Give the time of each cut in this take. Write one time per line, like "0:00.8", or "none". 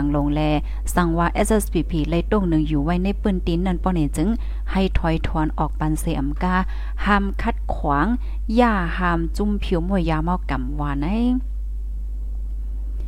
0:10.0